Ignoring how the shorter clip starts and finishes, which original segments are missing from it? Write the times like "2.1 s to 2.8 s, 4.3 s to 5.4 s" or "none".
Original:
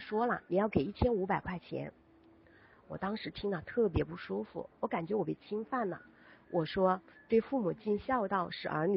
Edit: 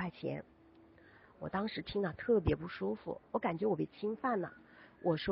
none

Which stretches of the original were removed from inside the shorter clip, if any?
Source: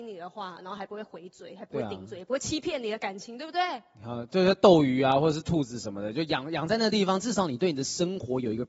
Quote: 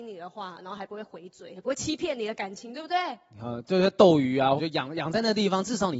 1.6 s to 2.2 s, 5.2 s to 6.1 s

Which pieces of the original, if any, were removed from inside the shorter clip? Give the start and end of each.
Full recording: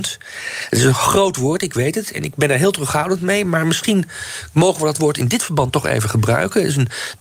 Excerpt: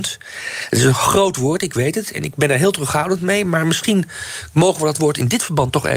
none

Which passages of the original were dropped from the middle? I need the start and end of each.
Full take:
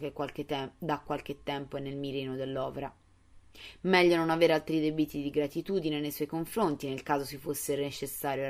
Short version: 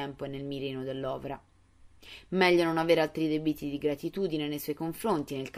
none

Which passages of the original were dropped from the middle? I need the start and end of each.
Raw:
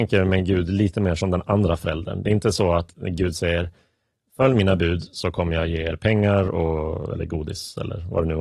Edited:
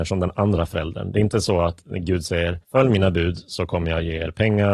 3.7 s to 4.3 s

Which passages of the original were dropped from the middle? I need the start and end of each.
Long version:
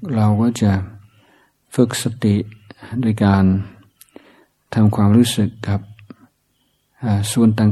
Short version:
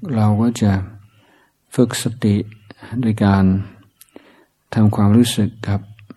none

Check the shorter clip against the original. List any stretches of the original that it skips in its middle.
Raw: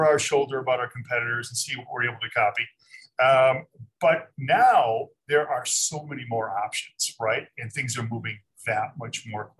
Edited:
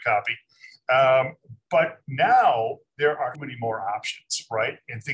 5.6 s to 6.0 s

